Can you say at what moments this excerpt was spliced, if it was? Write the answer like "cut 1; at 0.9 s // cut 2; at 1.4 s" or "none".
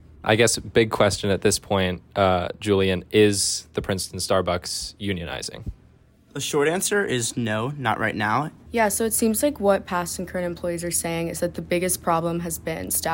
cut 1; at 8.7 s